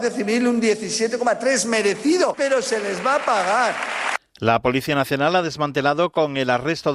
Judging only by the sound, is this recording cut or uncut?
uncut